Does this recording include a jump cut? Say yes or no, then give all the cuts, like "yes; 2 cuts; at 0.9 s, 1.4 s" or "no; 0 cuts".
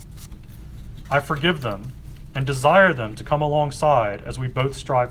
yes; 1 cut; at 1.0 s